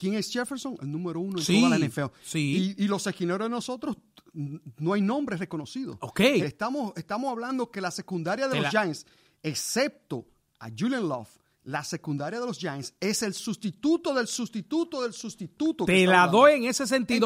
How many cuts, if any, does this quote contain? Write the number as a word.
one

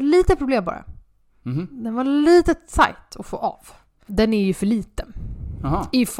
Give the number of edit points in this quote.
one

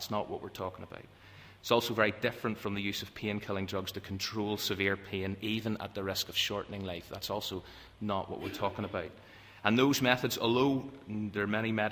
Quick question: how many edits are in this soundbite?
zero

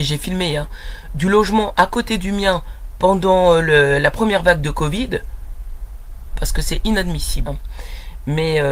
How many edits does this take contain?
two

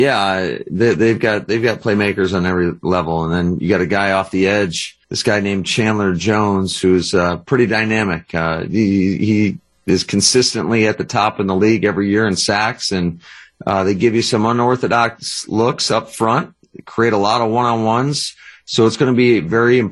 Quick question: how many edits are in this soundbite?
one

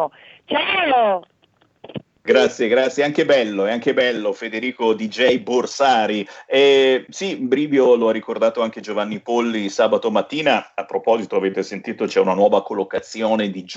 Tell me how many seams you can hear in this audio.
zero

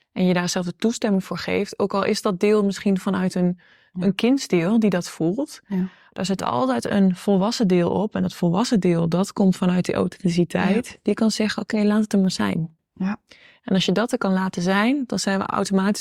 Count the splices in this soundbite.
zero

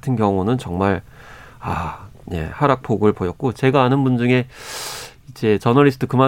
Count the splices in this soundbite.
one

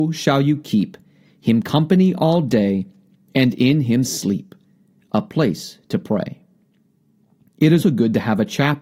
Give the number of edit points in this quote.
one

